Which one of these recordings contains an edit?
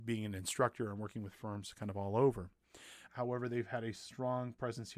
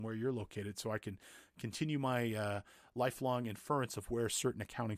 first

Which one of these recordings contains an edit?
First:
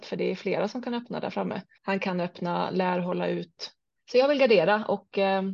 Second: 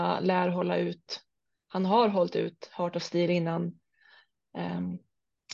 first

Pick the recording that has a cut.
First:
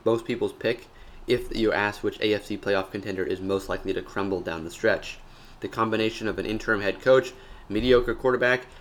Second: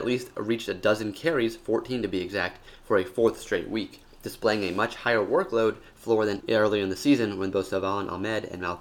second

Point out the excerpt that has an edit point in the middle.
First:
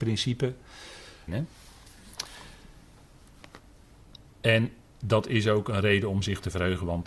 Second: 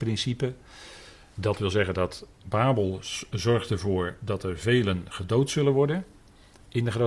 first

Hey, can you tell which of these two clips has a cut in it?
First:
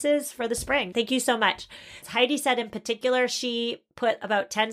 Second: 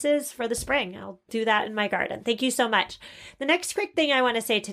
first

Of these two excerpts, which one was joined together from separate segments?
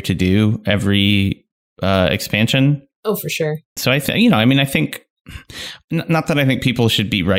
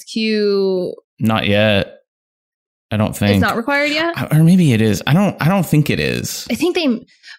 first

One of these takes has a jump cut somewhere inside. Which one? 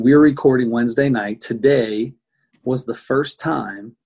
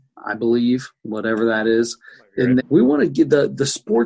second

